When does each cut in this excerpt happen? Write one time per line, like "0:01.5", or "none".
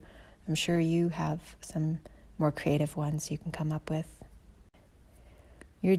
none